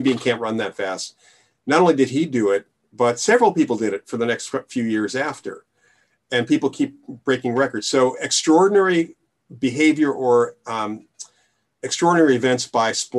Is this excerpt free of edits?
yes; 0 cuts

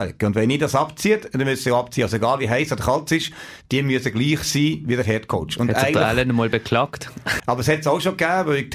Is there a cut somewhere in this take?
yes; 1 cut; at 7.4 s

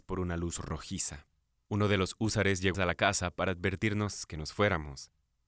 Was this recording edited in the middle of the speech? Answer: yes; 1 cut; at 2.7 s

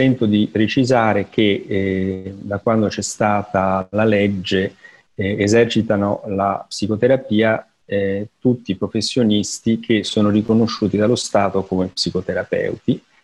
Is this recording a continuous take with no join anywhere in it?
yes; 0 cuts

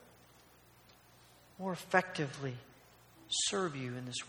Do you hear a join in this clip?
yes; 1 cut; at 3.2 s

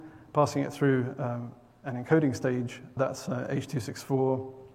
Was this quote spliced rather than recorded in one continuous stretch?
yes; 1 cut; at 3.0 s

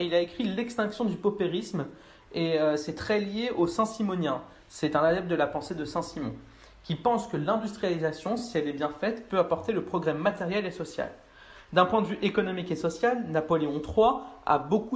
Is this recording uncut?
yes; 0 cuts

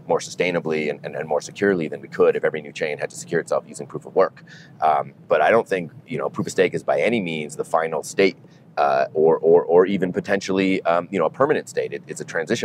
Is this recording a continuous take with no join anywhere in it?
yes; 0 cuts

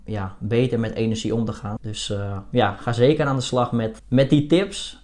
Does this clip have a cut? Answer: yes; 2 cuts; at 1.8 s, 4.0 s

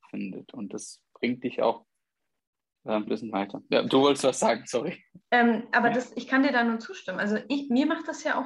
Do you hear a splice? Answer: yes; 2 cuts; at 3.1 s, 5.2 s

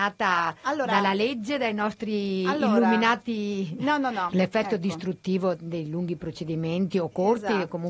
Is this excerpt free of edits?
no; 2 cuts; at 4.3 s, 5.5 s

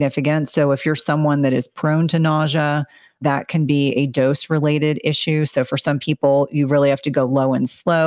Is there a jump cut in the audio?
no; 0 cuts

